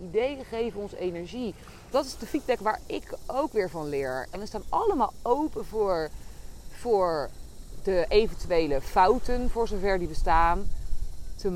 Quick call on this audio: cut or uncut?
cut